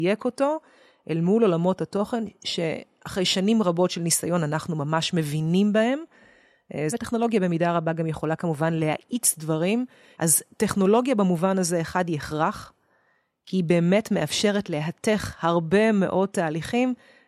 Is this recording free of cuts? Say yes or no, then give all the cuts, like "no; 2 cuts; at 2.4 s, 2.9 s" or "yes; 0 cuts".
no; 2 cuts; at 6.9 s, 10.1 s